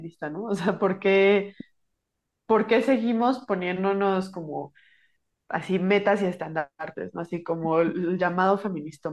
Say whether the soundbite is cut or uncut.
uncut